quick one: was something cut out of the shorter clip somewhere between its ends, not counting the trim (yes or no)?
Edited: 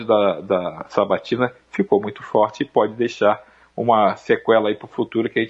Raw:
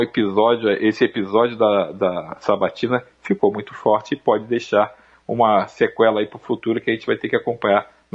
no